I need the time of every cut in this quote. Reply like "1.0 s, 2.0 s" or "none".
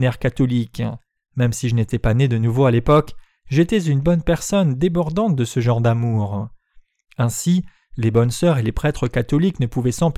1.2 s

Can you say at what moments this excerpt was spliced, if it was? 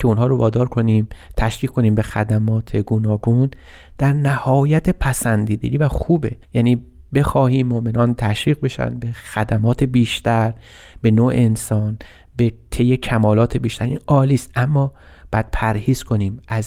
6.4 s

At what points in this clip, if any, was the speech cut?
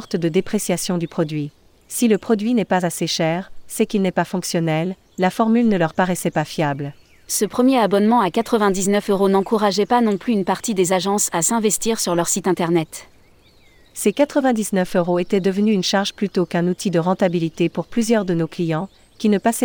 none

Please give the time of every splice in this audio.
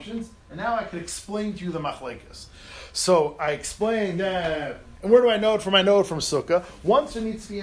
5.0 s

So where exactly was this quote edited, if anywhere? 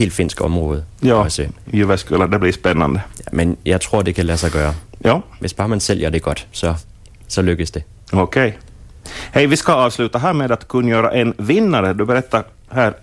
none

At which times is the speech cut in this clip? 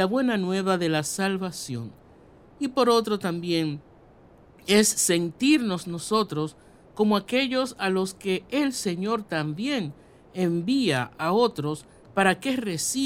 none

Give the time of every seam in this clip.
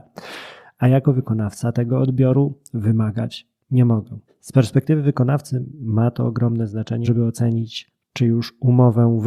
4.3 s, 7.0 s

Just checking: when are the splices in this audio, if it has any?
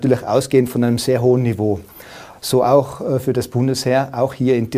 2.3 s

